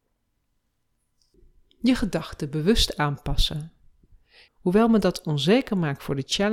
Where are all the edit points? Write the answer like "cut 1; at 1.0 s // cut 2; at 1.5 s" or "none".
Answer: cut 1; at 4.5 s